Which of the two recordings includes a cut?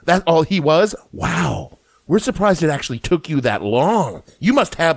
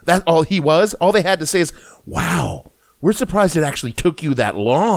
first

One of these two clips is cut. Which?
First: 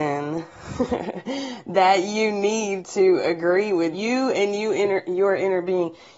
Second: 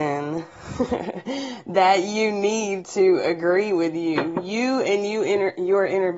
first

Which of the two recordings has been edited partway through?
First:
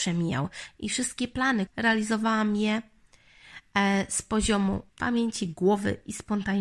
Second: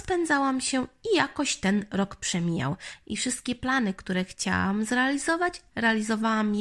first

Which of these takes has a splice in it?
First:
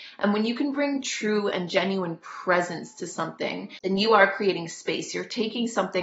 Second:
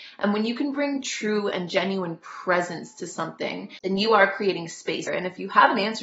second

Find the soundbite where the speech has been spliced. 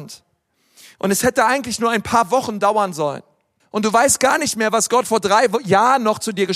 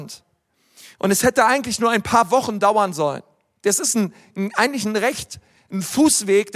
first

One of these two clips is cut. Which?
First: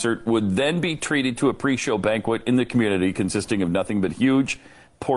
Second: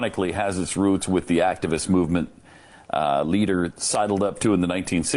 second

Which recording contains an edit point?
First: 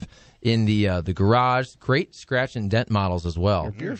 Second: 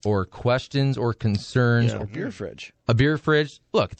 second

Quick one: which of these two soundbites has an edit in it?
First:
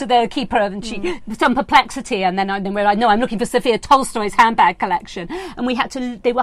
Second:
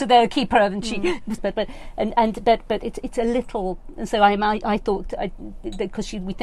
second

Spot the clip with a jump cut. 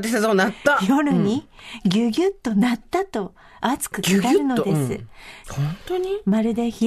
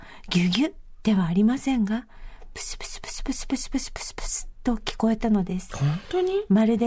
first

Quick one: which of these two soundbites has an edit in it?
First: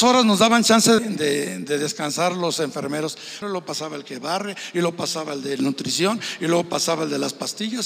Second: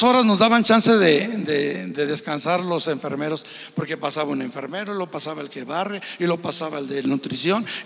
first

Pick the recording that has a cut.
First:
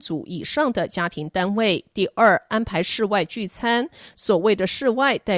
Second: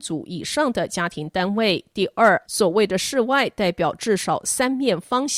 second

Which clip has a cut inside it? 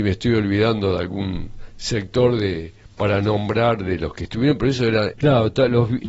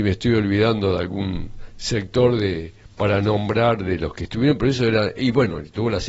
first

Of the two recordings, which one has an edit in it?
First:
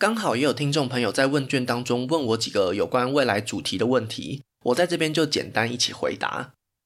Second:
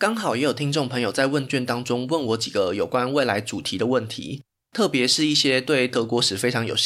first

